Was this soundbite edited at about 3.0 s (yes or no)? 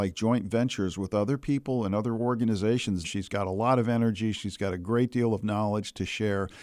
yes